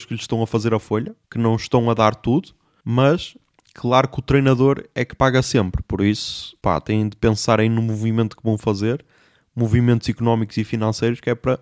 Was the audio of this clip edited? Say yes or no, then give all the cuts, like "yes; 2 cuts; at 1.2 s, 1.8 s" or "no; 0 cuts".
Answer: yes; 1 cut; at 1.2 s